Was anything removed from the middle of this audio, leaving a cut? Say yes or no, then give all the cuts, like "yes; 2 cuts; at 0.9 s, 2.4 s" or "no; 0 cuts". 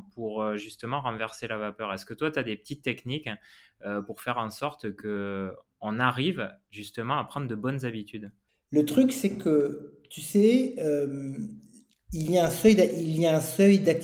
no; 0 cuts